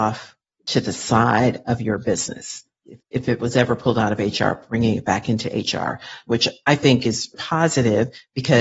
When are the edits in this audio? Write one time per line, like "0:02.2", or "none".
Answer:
0:02.9
0:06.3
0:07.3

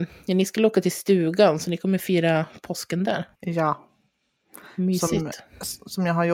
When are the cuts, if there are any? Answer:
0:03.3

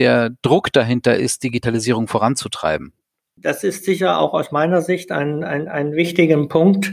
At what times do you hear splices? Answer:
none

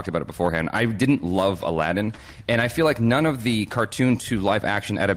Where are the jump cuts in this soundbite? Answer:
none

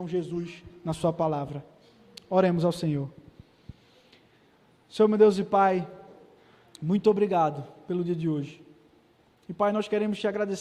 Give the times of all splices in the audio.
none

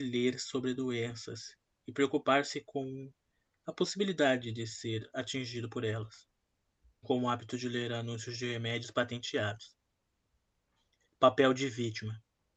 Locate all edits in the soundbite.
0:07.0

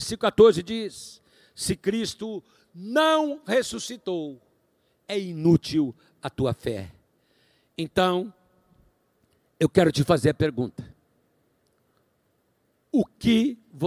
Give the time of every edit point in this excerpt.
none

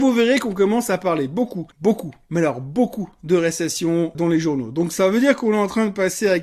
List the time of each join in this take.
0:01.7
0:04.1

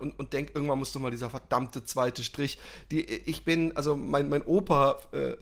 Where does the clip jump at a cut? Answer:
none

